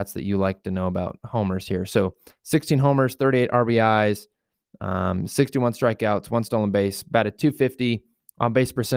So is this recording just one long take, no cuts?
yes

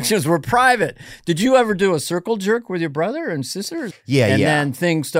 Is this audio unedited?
no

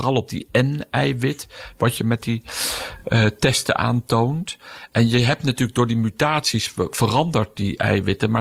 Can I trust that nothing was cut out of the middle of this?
yes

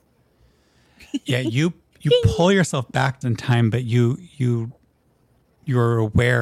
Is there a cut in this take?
yes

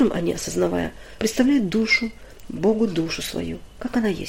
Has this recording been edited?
yes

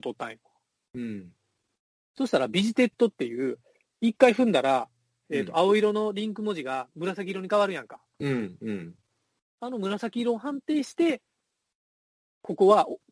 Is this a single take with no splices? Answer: yes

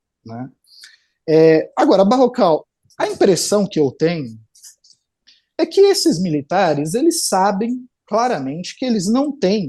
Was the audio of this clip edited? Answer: no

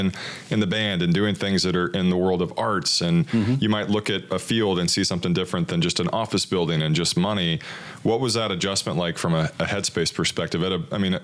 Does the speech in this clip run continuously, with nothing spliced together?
yes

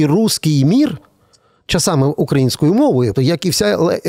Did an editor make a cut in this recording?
yes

